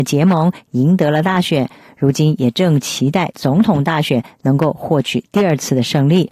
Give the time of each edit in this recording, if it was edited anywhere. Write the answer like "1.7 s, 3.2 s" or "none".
none